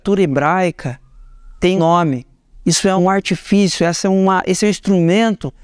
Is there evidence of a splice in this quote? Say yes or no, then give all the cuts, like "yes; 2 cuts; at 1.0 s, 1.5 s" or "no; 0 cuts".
yes; 2 cuts; at 1.8 s, 3.0 s